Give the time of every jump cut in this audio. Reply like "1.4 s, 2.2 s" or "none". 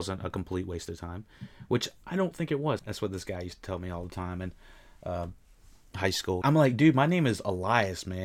2.8 s, 6.4 s